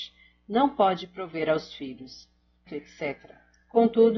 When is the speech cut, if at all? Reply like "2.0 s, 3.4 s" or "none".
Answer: 2.7 s